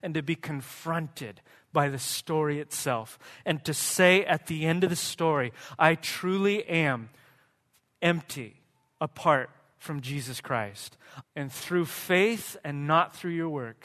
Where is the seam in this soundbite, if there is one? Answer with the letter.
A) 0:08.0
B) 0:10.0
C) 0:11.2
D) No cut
C